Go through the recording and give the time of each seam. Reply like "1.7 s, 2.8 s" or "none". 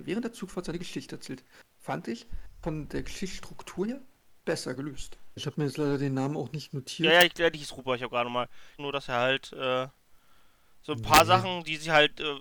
5.4 s, 8.8 s